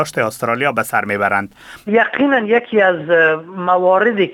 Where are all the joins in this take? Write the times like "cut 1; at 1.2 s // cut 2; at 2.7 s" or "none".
cut 1; at 1.9 s

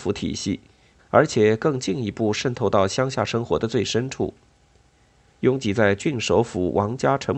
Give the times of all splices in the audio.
cut 1; at 1.0 s // cut 2; at 5.3 s

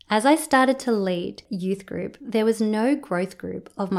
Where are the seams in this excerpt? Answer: none

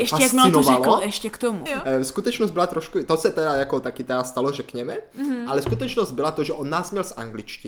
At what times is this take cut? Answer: cut 1; at 1.7 s

